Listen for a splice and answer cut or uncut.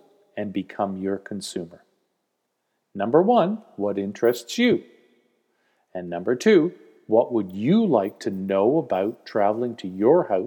uncut